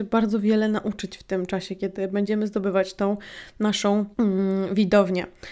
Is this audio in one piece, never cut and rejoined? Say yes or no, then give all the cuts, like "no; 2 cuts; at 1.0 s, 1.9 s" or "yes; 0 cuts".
no; 1 cut; at 4.1 s